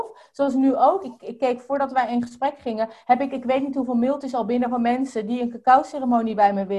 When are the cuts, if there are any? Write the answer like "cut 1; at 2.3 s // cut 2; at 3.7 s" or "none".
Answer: none